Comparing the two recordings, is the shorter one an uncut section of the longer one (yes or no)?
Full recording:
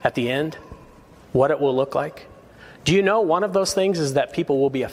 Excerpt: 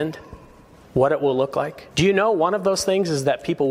no